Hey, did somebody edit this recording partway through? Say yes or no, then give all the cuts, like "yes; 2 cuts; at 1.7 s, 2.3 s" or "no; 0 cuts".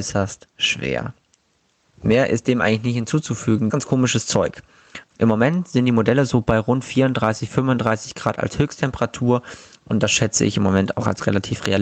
yes; 2 cuts; at 3.7 s, 5.1 s